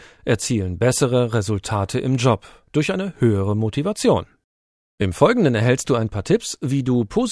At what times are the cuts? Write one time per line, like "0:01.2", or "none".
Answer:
none

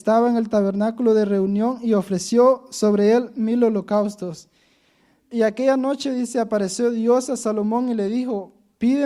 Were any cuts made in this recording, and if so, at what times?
none

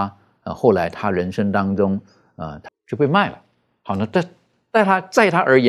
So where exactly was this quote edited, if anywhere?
0:02.7

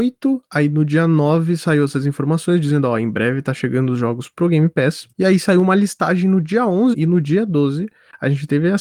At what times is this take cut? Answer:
0:05.1
0:06.9

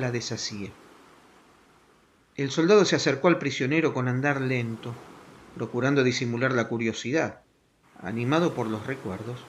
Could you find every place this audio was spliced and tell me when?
0:07.8

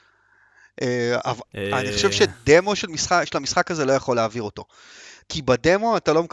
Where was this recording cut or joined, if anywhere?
0:01.4

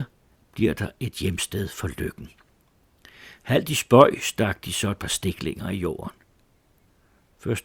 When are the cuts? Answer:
none

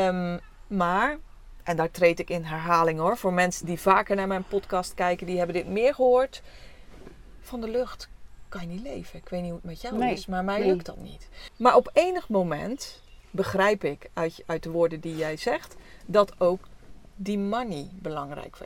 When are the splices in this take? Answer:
0:11.5
0:13.2

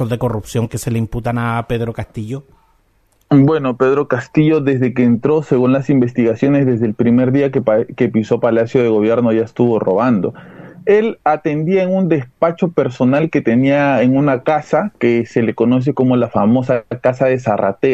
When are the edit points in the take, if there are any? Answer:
none

